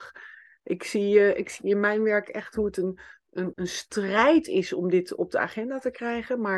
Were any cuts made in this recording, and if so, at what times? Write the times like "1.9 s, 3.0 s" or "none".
3.5 s